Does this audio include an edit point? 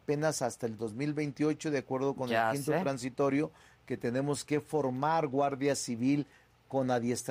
no; 0 cuts

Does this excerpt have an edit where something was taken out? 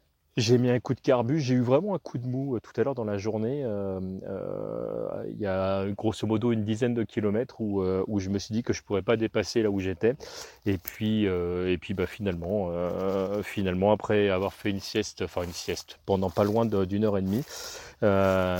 yes; 1 cut; at 16.0 s

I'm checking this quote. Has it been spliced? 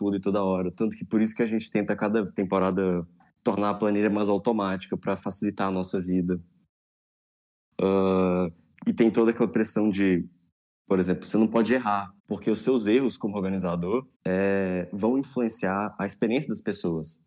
yes; 2 cuts; at 12.2 s, 14.1 s

